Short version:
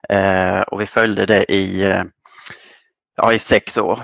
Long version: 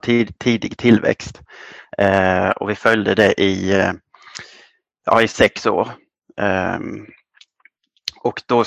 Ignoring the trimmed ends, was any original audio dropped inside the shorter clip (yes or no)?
no